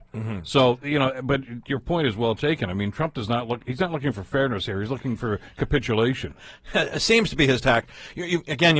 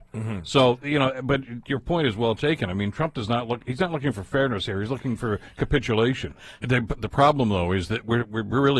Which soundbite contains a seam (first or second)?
second